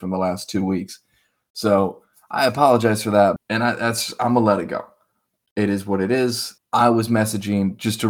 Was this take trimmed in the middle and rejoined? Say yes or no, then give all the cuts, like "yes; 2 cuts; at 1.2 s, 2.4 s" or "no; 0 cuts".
yes; 2 cuts; at 3.4 s, 6.6 s